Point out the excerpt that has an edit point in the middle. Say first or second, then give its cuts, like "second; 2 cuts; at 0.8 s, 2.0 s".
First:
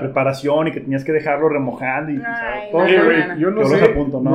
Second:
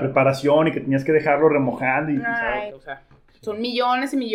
second; 1 cut; at 2.7 s